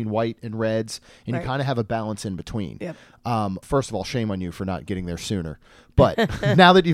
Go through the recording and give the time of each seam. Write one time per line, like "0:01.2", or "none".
0:03.6